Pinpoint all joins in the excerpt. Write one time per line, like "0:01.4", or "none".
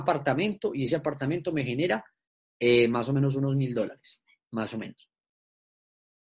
none

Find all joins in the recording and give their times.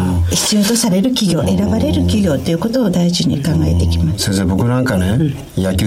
none

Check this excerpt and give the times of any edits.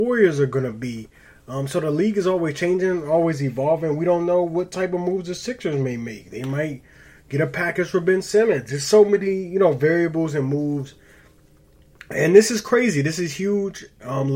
none

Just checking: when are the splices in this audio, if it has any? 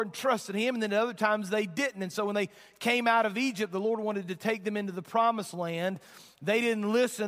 none

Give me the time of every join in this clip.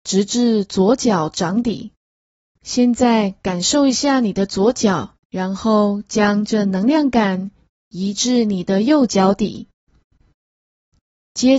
0:02.6
0:05.2

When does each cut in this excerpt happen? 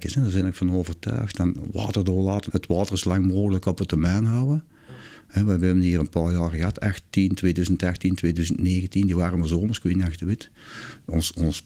0:02.5

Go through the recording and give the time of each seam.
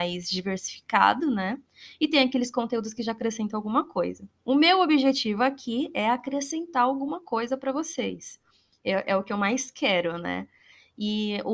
none

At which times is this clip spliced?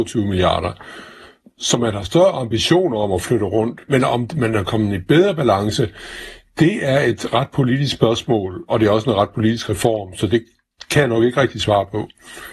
none

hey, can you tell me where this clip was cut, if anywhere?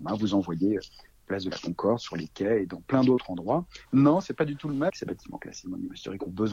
0:03.9
0:04.9

